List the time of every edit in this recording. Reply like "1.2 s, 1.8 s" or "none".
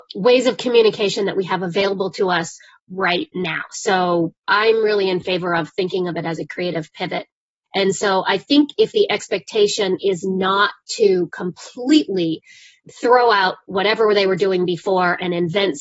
7.7 s

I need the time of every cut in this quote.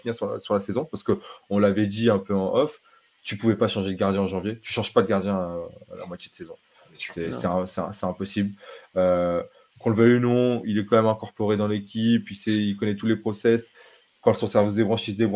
none

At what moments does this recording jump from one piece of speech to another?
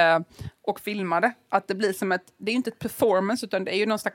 none

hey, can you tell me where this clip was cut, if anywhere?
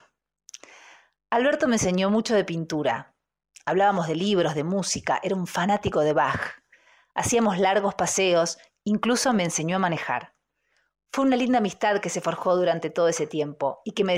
none

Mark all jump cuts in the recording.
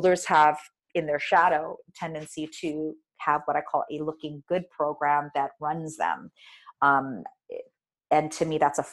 6.7 s

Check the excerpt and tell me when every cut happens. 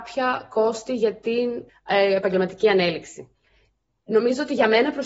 1.7 s

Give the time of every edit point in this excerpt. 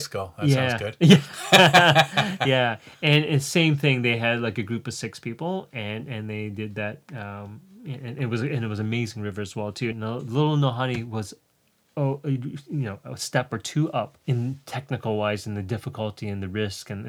9.9 s, 14.2 s

